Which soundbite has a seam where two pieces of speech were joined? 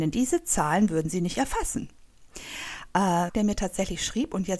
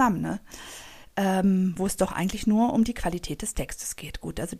first; 1 cut; at 3.3 s

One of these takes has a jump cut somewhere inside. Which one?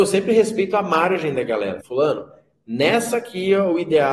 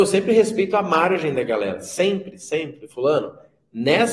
first; 1 cut; at 1.8 s

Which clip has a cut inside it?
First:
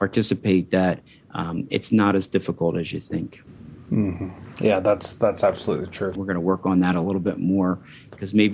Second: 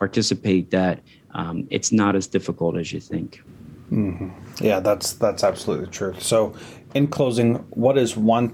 first; 1 cut; at 6.1 s

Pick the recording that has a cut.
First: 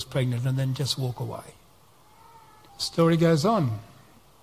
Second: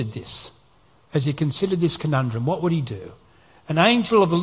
first; 1 cut; at 2.7 s

